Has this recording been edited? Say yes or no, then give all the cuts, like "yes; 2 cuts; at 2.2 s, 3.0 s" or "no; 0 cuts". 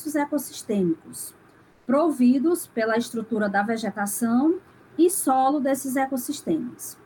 no; 0 cuts